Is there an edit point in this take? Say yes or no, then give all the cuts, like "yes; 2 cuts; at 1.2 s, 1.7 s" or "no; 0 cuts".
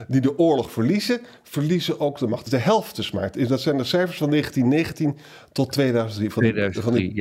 no; 0 cuts